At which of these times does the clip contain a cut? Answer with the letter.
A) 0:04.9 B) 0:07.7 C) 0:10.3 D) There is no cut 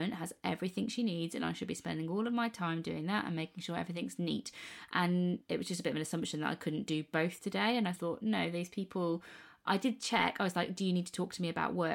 A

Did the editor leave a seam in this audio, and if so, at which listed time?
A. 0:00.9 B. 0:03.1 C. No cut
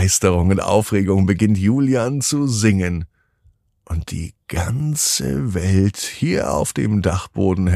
C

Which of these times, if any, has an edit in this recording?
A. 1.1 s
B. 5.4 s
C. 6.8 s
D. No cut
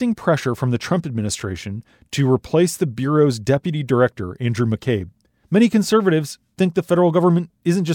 B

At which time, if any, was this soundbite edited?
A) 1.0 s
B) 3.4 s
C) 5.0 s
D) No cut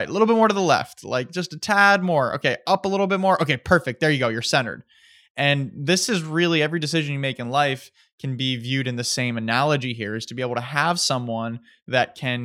D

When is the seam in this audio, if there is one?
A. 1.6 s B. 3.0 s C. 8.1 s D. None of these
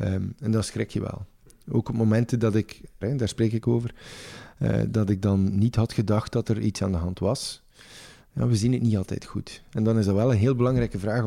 B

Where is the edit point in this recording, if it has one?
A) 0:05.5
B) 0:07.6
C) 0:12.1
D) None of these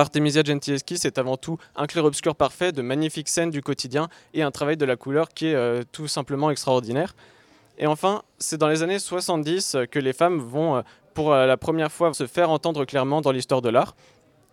C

